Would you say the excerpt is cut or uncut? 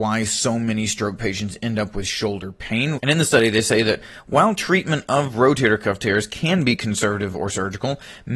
cut